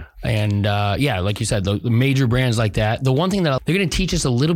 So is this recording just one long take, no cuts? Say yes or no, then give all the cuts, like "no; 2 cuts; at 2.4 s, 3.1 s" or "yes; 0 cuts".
no; 1 cut; at 3.6 s